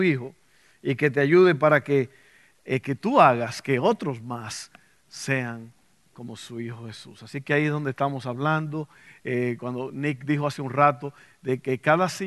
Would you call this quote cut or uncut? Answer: uncut